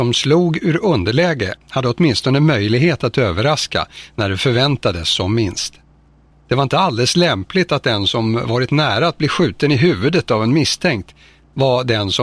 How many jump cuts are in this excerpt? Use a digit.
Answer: 1